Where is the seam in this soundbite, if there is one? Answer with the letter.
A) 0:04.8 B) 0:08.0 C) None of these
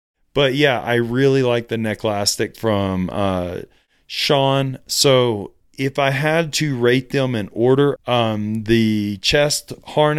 B